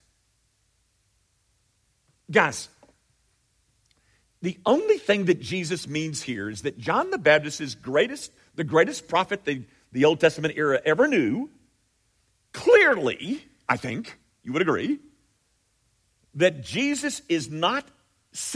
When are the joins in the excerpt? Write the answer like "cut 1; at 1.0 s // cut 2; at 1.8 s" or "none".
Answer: cut 1; at 12.4 s